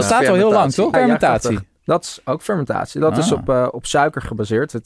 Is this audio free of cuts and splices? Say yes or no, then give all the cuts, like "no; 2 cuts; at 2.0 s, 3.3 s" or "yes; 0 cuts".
no; 1 cut; at 0.9 s